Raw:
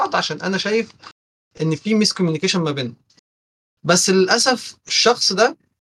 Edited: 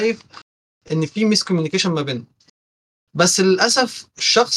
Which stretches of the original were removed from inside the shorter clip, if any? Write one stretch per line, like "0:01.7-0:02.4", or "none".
none